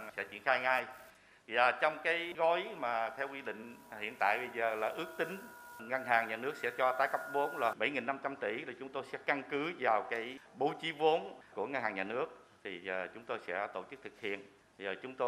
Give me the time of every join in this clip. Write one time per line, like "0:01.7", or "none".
none